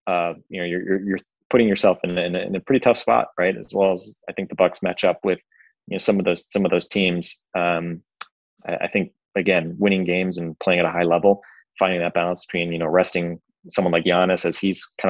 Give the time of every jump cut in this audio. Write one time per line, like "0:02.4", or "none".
none